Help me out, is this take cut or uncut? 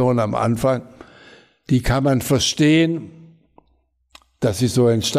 uncut